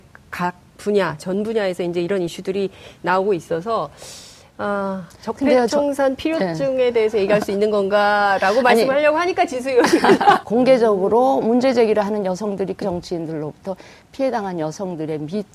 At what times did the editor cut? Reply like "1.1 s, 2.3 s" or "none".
10.4 s, 12.8 s